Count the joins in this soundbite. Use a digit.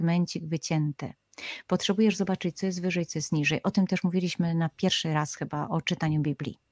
0